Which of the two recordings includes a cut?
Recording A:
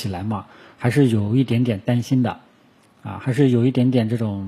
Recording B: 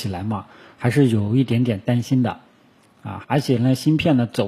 B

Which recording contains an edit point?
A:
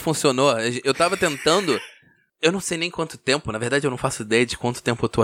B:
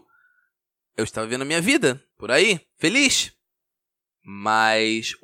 B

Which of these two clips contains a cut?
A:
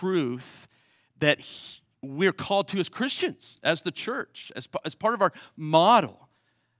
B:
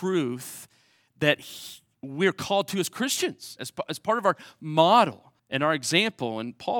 B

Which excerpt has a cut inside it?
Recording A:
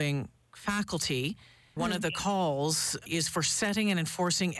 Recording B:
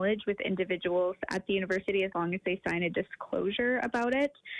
A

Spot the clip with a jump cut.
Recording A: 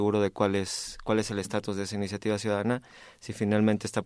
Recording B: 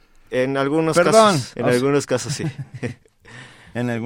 B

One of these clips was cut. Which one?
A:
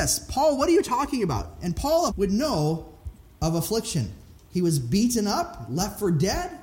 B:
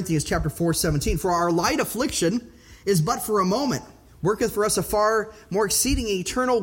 A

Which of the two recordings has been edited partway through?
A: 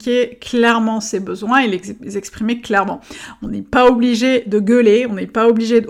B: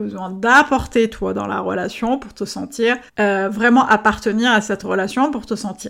B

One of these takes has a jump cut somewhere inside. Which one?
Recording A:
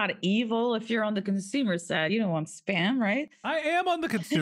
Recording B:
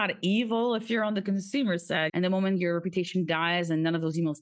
B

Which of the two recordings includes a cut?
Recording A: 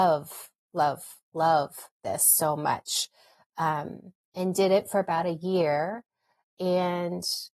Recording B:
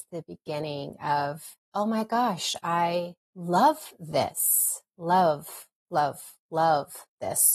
B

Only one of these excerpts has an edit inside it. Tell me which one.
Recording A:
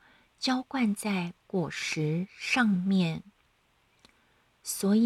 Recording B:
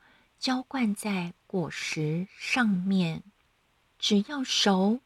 B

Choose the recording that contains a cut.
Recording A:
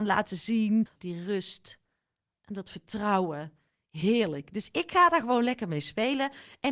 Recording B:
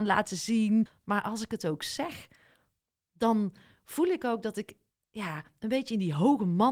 A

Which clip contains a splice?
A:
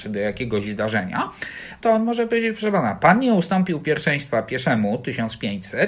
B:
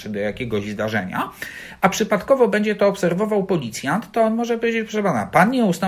A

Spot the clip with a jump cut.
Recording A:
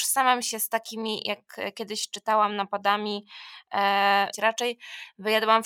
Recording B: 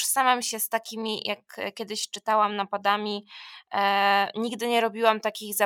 A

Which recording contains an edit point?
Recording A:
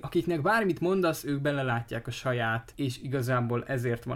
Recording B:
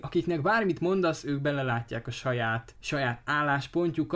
A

